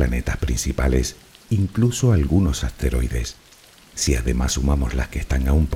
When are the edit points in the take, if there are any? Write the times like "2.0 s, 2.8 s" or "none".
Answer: 1.3 s